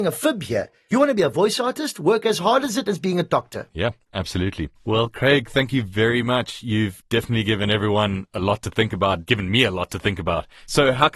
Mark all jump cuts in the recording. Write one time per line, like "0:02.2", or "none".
0:04.8